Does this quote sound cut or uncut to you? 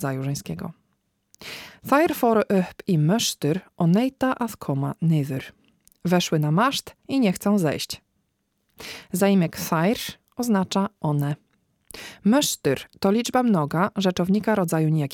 uncut